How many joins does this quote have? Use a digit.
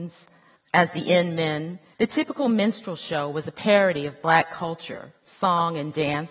1